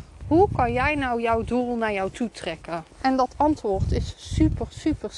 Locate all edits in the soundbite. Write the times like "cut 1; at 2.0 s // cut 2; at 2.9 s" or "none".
cut 1; at 2.9 s

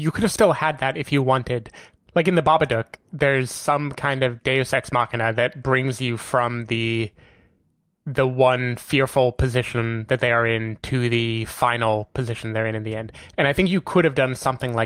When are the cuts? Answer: cut 1; at 2.0 s

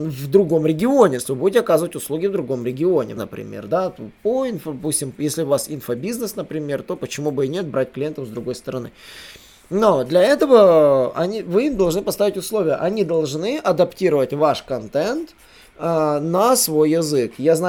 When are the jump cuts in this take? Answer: cut 1; at 1.2 s // cut 2; at 3.2 s

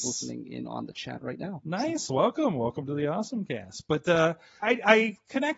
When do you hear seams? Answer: cut 1; at 4.6 s

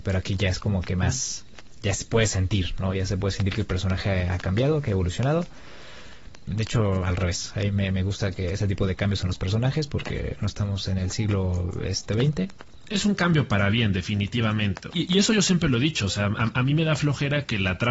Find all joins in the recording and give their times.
cut 1; at 6.5 s // cut 2; at 14.9 s

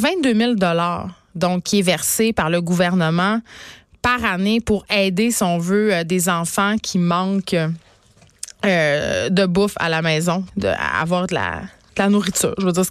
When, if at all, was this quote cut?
cut 1; at 10.5 s

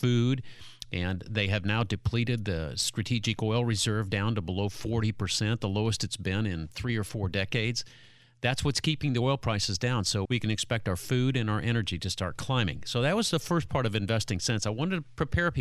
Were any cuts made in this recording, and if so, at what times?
cut 1; at 10.2 s

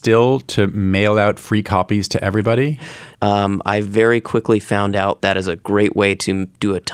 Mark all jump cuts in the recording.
cut 1; at 3.1 s // cut 2; at 5.2 s

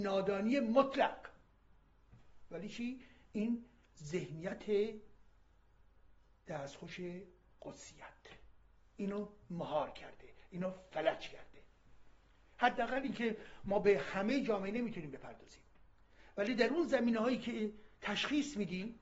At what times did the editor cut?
none

